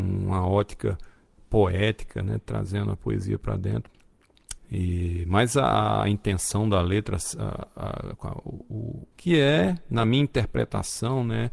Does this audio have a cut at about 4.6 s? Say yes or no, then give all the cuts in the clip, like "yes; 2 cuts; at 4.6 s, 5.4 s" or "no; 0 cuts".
yes; 2 cuts; at 4.6 s, 9.1 s